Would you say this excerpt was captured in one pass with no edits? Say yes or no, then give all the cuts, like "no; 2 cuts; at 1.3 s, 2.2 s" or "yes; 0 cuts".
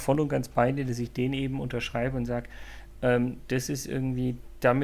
yes; 0 cuts